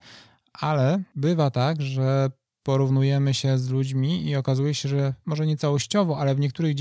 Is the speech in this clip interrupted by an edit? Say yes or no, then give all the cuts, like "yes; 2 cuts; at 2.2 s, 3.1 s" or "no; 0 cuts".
no; 0 cuts